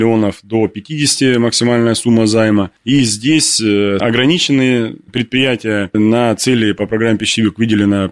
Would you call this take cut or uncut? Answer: cut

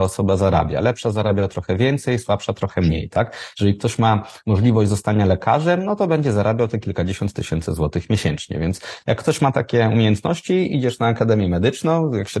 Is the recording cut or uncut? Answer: uncut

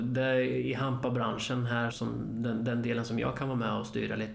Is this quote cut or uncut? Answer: cut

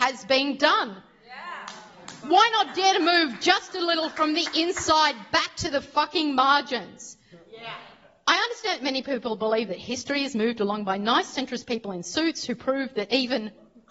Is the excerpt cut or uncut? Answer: uncut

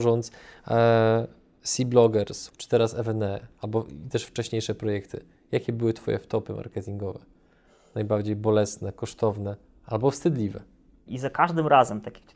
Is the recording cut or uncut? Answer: cut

